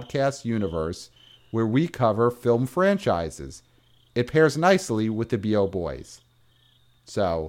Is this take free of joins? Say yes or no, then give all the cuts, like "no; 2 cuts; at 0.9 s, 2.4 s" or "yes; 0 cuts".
yes; 0 cuts